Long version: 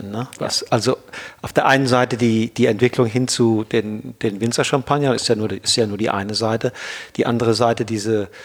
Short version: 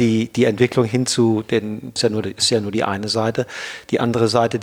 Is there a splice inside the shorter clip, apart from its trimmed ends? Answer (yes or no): yes